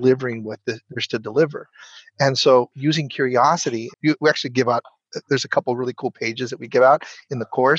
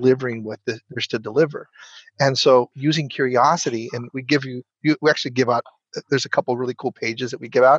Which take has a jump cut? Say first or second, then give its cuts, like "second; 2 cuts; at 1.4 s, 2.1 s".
first; 1 cut; at 3.9 s